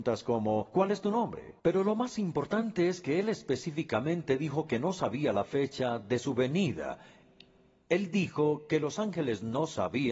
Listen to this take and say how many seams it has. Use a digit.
1